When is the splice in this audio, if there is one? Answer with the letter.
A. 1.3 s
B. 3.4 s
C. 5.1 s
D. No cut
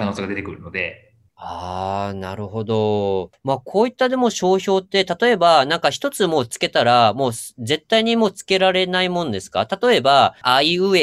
A